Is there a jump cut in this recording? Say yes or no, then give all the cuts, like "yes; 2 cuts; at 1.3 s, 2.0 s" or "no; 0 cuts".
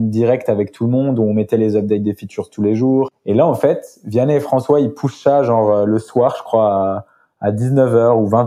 no; 0 cuts